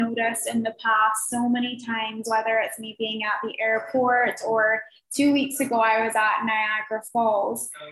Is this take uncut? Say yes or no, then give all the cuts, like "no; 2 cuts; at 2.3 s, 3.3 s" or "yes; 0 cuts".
yes; 0 cuts